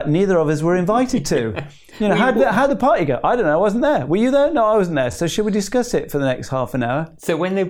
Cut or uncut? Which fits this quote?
uncut